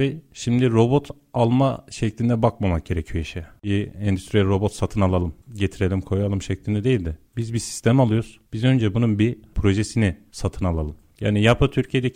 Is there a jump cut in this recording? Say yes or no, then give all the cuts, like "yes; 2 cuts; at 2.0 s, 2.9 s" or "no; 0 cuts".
no; 0 cuts